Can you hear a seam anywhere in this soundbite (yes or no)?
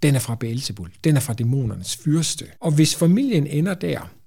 yes